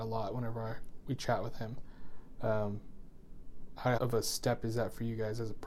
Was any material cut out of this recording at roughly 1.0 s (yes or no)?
no